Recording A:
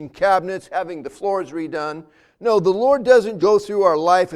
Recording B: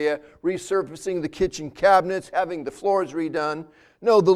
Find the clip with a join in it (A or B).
A